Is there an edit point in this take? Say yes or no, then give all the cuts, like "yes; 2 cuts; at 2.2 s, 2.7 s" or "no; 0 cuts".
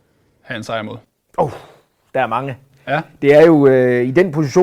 no; 0 cuts